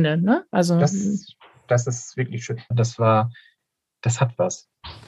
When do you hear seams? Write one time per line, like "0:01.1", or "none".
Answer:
0:02.7